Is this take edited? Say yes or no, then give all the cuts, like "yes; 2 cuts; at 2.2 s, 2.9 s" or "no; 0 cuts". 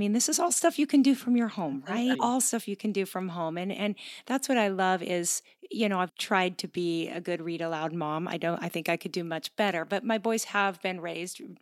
yes; 2 cuts; at 2.1 s, 6.1 s